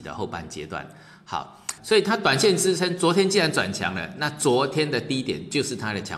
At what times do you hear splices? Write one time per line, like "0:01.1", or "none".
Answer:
0:01.8